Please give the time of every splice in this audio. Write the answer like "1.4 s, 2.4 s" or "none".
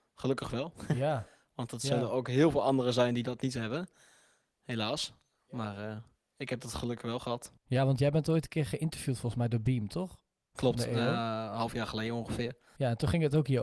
none